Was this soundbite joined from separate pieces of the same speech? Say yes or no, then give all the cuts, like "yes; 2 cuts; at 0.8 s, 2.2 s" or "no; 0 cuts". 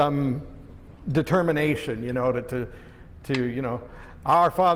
no; 0 cuts